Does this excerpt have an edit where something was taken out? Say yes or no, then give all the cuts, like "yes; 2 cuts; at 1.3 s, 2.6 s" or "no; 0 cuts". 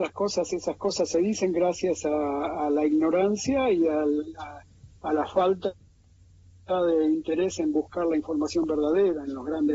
no; 0 cuts